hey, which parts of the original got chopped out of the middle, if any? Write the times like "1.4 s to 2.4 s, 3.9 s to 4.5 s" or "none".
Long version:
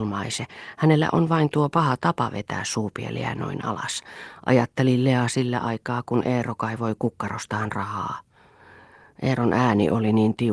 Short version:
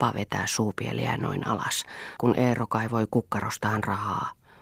4.3 s to 6.0 s